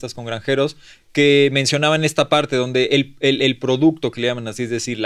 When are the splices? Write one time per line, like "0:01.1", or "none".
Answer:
none